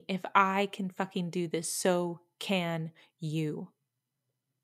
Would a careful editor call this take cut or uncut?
uncut